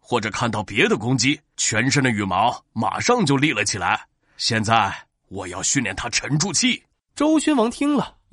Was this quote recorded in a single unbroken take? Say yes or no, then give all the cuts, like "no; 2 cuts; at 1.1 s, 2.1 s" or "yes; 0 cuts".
yes; 0 cuts